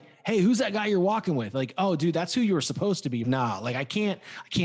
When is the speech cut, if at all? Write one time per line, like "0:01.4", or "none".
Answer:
0:03.2